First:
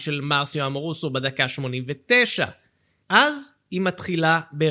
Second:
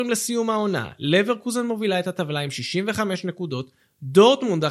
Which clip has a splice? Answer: first; 1 cut; at 3.0 s

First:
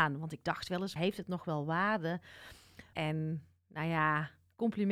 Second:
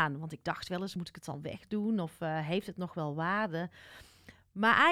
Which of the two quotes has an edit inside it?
first; 2 cuts; at 1.0 s, 2.9 s

